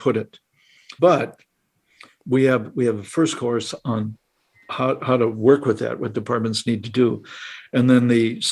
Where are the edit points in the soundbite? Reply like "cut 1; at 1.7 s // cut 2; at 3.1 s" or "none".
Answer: cut 1; at 1.0 s

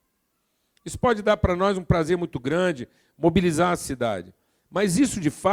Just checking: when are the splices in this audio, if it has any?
none

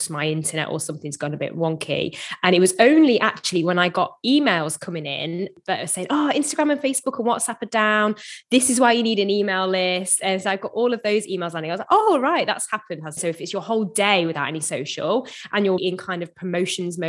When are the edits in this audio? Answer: cut 1; at 13.2 s // cut 2; at 15.8 s

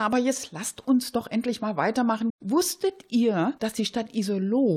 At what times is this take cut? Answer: cut 1; at 2.3 s

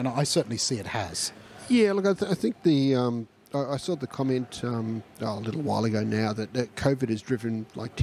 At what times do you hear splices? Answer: none

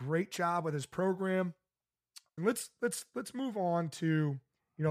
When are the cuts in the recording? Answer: cut 1; at 2.4 s

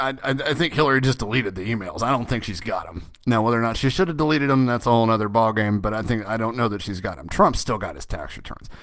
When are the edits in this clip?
none

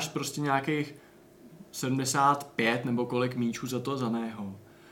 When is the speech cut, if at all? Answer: none

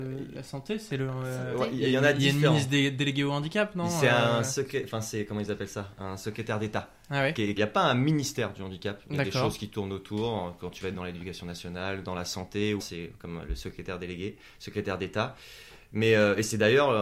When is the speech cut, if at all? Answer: cut 1; at 7.6 s // cut 2; at 12.8 s

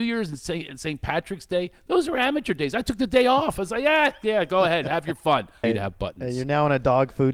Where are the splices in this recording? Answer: cut 1; at 5.6 s

